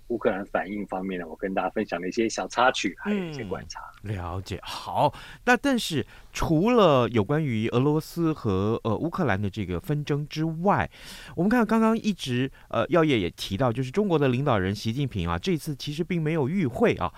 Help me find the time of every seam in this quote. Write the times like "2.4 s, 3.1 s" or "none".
none